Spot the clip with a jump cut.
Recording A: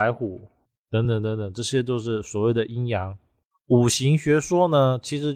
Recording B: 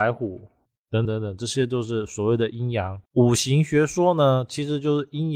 B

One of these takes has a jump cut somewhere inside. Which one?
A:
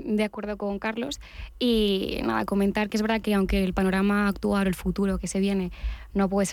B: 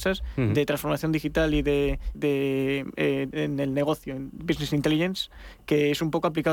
B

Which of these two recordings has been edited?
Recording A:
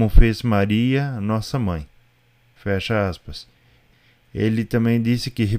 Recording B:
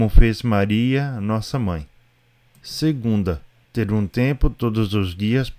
B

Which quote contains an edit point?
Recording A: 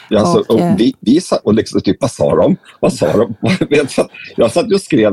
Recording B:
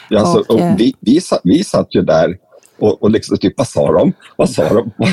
A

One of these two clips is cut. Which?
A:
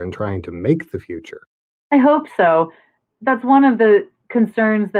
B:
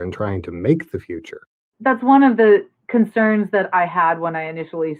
B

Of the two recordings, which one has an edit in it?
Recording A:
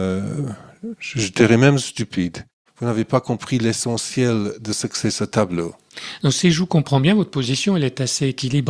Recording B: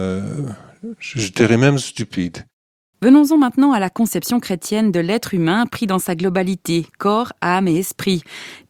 A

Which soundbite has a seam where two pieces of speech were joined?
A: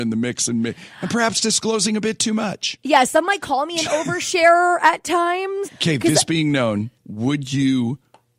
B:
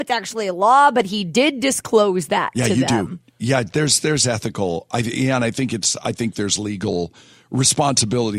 A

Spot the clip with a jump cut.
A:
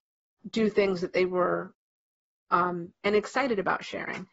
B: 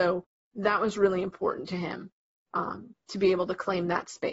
A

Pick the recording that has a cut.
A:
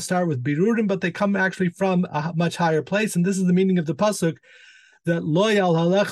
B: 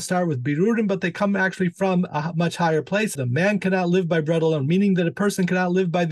B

